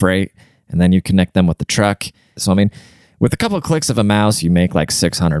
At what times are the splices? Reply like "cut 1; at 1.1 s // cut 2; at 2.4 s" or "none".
cut 1; at 2.4 s